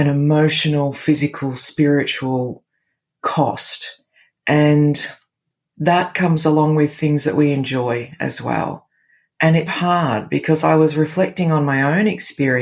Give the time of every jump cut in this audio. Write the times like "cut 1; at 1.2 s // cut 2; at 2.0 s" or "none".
cut 1; at 9.7 s